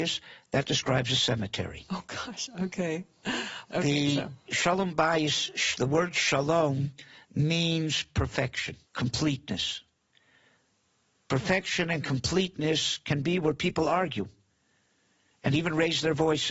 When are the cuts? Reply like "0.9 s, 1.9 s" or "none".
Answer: 3.7 s, 8.8 s